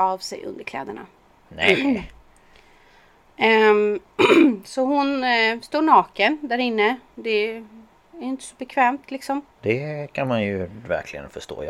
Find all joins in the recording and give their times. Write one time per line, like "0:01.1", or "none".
0:09.5